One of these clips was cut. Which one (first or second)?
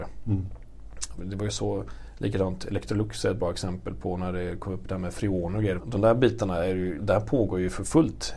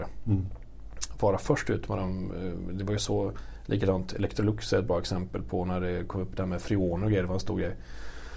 first